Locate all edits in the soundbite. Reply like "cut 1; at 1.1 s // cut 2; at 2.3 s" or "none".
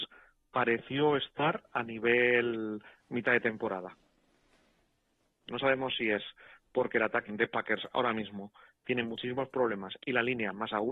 cut 1; at 5.4 s // cut 2; at 7.3 s